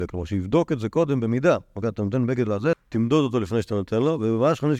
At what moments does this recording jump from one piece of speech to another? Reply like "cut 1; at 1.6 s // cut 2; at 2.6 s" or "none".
cut 1; at 2.7 s